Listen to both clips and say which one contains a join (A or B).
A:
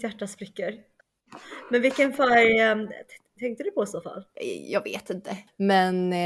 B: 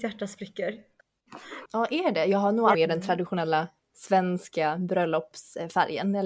B